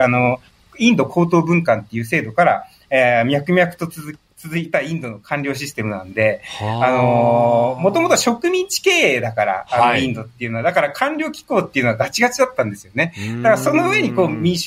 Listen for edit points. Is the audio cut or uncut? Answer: uncut